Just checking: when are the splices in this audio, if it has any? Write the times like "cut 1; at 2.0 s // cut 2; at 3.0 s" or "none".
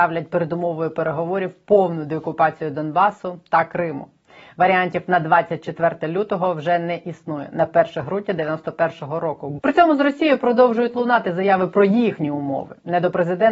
cut 1; at 9.6 s